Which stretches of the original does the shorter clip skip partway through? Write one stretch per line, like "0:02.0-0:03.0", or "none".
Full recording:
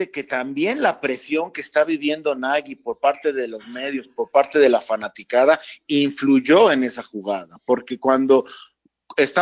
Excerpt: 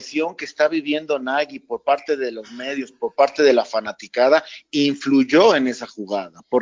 none